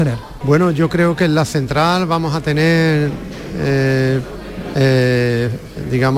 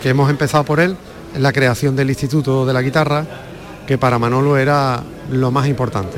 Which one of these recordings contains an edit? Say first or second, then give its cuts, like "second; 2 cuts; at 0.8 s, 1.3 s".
first; 1 cut; at 4.7 s